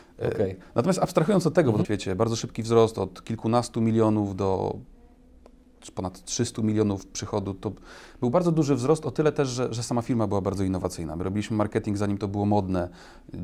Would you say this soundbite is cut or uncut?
cut